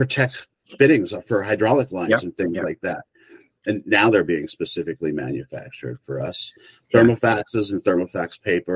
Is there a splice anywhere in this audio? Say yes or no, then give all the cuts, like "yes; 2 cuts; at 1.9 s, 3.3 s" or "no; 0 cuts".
no; 0 cuts